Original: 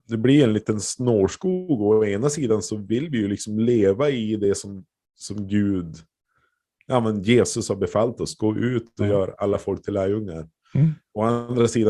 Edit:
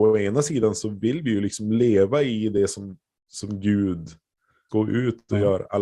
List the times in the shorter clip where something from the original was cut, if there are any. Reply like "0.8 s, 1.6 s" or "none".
4.7 s